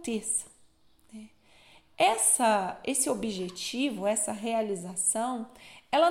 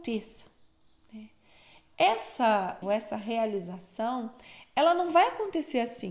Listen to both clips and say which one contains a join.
second; 1 cut; at 2.8 s

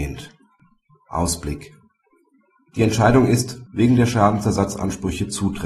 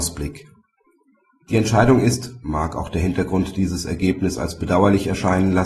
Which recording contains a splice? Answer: first; 1 cut; at 3.7 s

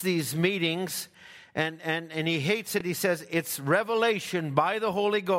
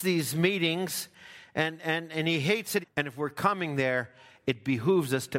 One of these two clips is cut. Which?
second; 1 cut; at 2.8 s

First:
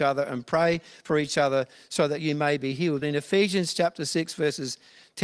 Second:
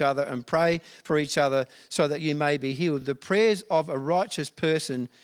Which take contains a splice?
first; 1 cut; at 3.0 s

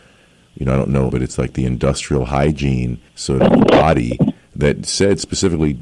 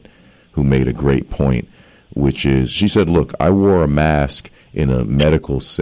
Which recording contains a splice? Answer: first; 2 cuts; at 1.1 s, 3.1 s

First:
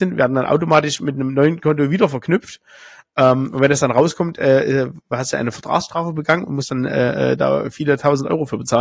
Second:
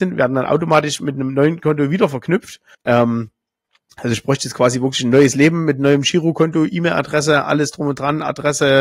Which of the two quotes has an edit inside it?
second; 1 cut; at 2.7 s

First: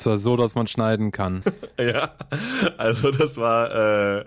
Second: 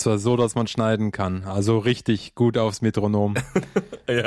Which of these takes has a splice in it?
first; 1 cut; at 1.4 s

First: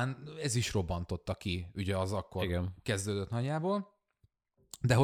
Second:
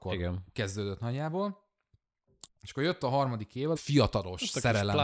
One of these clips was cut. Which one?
second; 2 cuts; at 2.5 s, 3.8 s

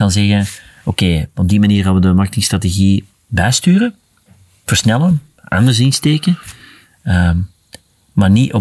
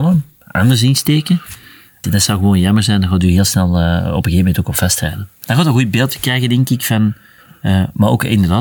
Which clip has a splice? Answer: second; 2 cuts; at 2.0 s, 5.4 s

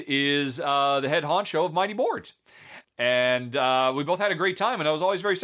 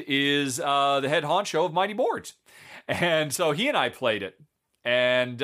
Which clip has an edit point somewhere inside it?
first; 1 cut; at 2.8 s

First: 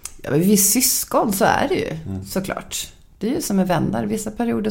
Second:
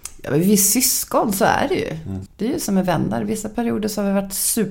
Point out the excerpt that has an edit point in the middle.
second; 1 cut; at 2.3 s

